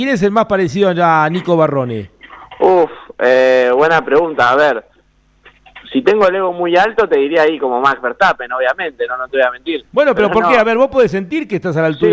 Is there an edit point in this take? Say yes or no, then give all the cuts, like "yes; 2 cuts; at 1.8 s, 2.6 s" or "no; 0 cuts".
no; 0 cuts